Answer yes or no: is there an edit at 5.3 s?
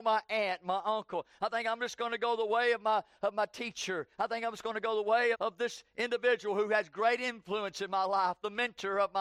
yes